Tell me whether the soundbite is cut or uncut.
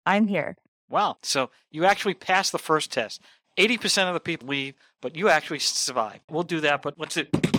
cut